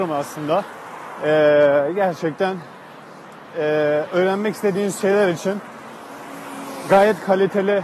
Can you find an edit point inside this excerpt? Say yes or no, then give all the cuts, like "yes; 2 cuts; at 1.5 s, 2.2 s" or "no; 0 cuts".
no; 0 cuts